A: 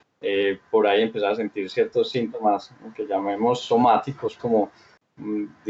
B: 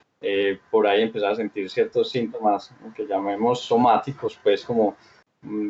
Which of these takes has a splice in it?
A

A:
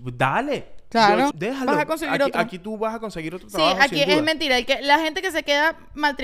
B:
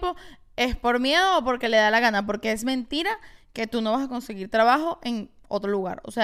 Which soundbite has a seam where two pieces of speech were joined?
A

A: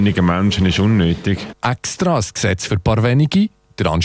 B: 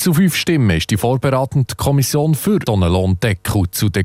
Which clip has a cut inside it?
B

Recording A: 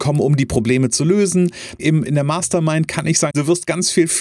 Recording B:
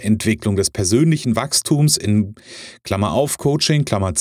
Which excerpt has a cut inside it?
A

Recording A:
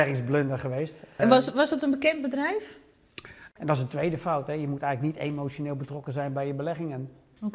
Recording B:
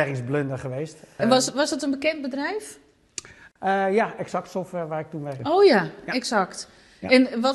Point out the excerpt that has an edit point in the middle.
A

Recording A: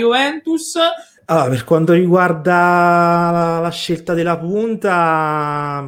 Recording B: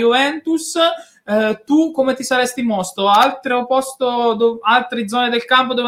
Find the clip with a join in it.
A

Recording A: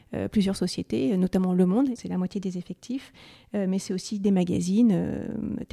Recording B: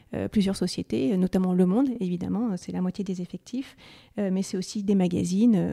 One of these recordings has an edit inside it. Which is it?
A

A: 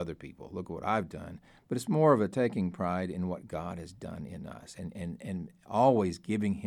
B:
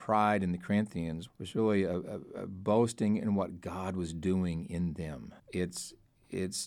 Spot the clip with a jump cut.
B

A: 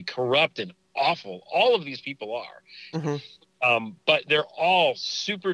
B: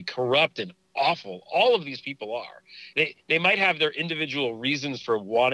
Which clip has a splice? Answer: A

